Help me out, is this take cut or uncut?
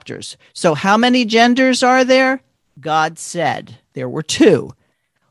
cut